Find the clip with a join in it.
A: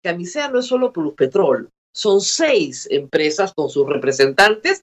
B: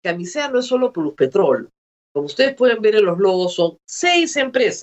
A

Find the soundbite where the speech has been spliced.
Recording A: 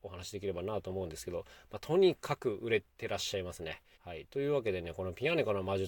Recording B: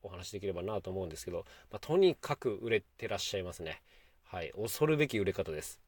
A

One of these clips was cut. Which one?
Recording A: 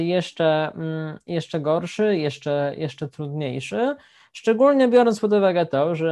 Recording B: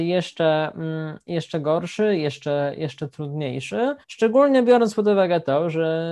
B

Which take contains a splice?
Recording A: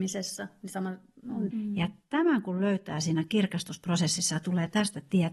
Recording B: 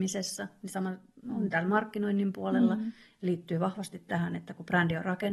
A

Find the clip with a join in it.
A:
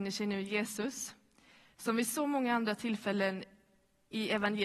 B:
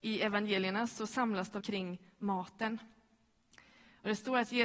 B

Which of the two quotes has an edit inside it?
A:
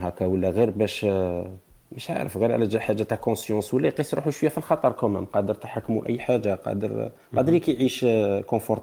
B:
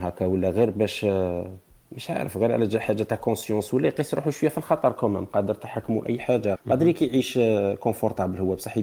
B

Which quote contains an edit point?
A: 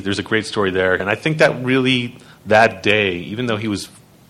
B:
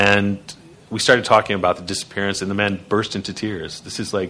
A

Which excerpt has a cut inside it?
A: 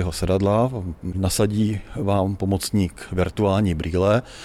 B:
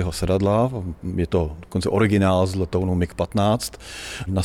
A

